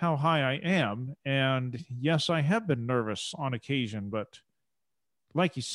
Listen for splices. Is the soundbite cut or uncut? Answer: uncut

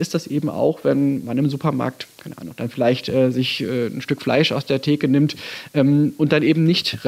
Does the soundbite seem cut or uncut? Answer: uncut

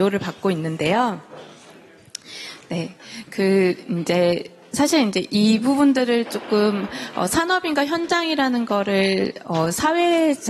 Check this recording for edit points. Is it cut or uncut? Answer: uncut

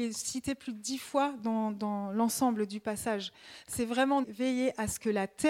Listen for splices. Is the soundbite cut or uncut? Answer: cut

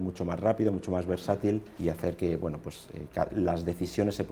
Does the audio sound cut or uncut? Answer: cut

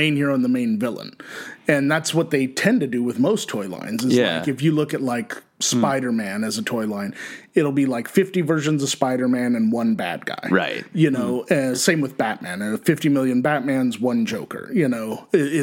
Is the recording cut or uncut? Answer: uncut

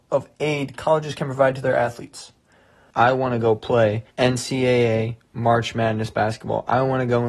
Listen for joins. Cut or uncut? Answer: cut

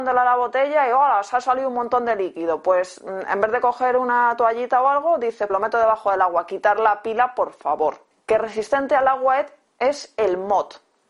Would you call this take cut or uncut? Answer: cut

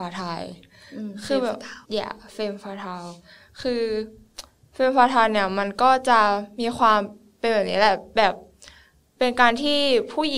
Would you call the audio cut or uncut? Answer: cut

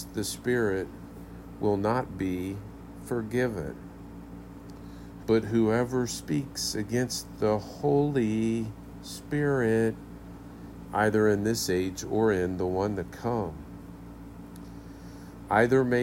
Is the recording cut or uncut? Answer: cut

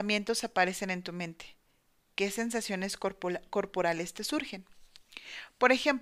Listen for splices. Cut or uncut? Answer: uncut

